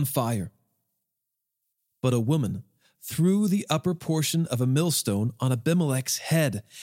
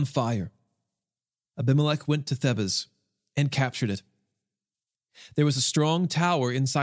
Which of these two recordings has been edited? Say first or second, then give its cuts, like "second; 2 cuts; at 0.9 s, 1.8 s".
second; 2 cuts; at 1.5 s, 3.3 s